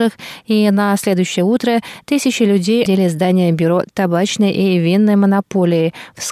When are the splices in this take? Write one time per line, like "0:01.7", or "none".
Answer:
0:02.9